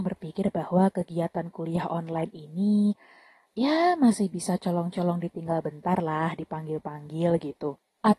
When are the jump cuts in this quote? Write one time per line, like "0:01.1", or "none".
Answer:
0:03.4